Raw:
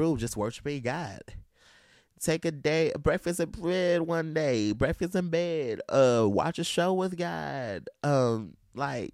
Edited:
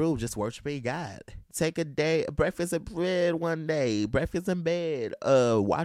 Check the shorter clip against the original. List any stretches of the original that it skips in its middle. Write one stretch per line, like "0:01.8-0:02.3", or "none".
0:01.4-0:02.1